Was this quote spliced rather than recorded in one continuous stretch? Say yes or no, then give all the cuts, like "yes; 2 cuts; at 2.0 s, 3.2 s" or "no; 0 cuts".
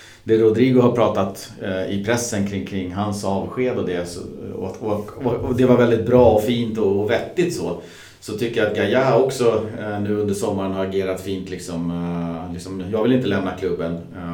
no; 0 cuts